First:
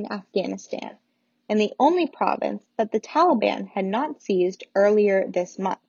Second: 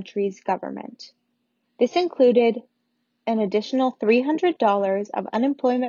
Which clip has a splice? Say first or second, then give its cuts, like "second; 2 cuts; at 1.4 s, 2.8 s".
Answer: second; 1 cut; at 1.6 s